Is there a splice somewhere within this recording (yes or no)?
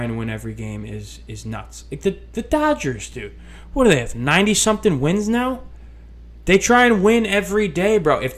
no